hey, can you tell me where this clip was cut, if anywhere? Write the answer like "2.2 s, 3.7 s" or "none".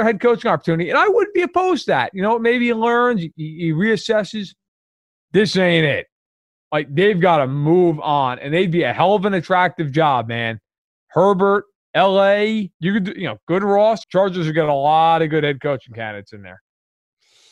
12.7 s, 14.0 s